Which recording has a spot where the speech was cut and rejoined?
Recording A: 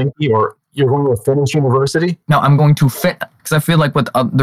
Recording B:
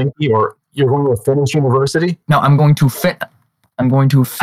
A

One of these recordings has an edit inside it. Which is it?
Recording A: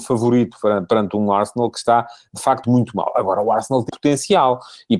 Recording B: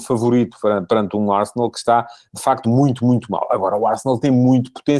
A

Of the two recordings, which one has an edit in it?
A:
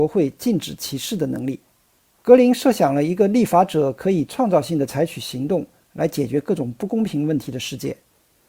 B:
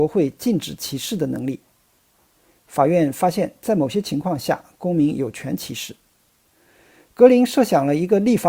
A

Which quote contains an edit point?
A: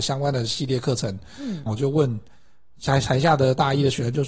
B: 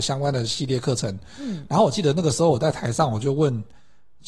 A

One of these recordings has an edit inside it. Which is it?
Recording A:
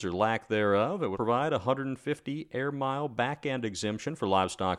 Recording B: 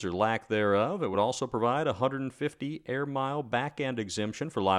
A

